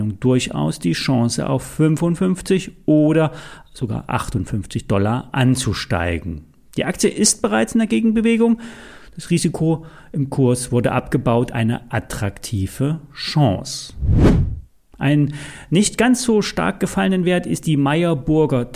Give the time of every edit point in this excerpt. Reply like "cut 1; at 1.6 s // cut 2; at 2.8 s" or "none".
none